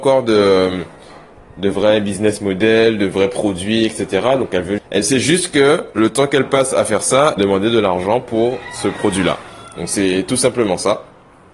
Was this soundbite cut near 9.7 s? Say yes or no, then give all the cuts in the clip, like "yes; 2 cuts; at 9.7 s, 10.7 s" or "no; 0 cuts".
no; 2 cuts; at 4.8 s, 7.4 s